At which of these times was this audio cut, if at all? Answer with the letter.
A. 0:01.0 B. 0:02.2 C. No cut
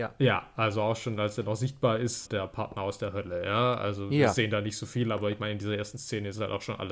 B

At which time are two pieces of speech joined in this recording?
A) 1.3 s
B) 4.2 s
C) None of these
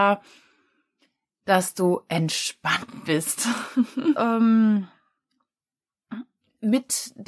B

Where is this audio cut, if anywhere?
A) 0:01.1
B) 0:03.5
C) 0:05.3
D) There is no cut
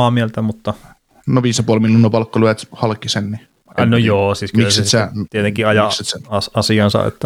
D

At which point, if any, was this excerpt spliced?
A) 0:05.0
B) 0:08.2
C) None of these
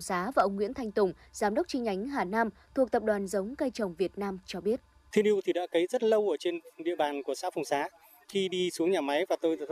B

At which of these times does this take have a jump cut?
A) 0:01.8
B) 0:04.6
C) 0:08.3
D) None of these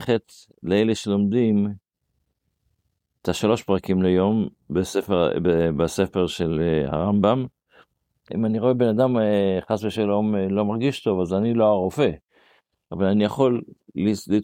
C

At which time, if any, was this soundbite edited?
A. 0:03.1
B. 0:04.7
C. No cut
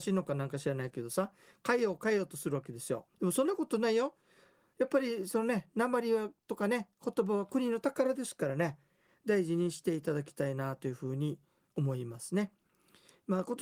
A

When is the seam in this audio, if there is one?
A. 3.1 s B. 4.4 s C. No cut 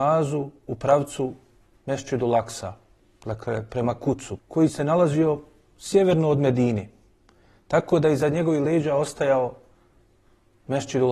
B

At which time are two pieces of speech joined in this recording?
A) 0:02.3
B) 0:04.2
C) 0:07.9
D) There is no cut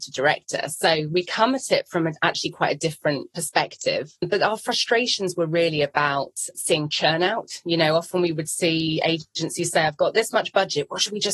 D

